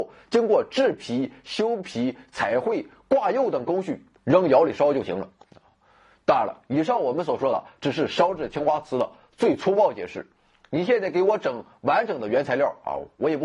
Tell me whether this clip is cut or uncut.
uncut